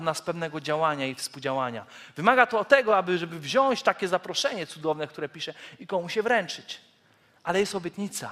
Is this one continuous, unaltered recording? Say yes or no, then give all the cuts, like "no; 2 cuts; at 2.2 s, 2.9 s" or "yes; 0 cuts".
yes; 0 cuts